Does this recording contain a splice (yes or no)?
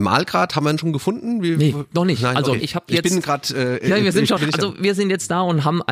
yes